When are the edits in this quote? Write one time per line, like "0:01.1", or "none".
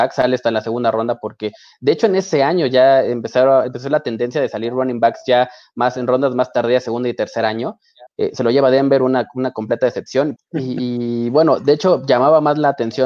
0:08.1
0:10.4